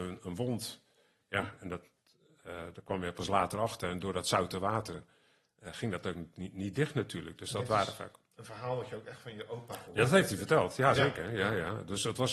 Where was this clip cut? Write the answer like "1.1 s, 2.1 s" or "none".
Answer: none